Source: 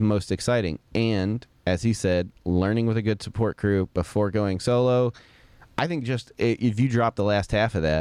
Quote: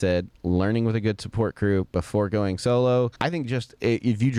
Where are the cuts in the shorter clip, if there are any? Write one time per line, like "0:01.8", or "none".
0:03.2